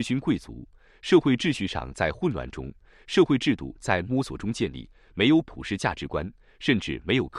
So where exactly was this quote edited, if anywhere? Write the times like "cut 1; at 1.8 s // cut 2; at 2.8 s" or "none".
none